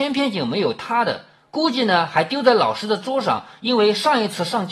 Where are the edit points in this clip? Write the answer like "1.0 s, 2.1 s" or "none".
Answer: none

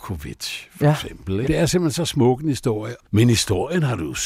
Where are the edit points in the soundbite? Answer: 1.4 s, 3.0 s

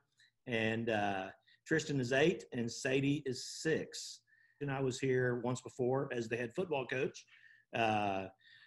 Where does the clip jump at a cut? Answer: 4.6 s

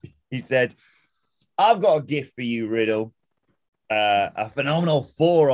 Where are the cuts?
none

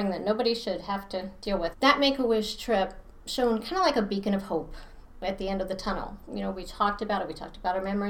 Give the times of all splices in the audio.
1.7 s

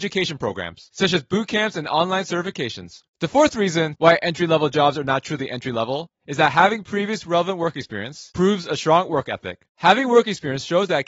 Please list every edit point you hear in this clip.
9.7 s

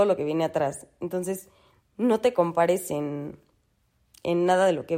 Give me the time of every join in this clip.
none

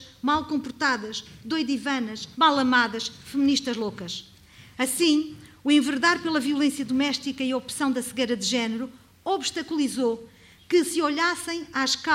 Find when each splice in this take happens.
2.3 s

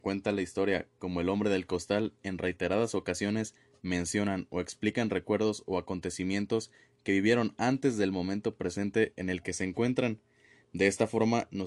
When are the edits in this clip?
none

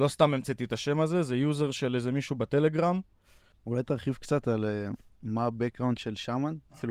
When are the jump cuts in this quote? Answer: 3.5 s

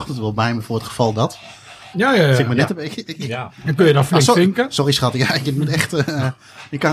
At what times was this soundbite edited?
1.9 s

